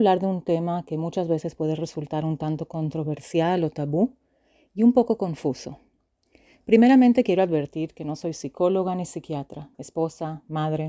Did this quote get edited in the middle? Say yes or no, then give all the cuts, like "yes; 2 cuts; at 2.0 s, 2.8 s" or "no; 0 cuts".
yes; 1 cut; at 9.7 s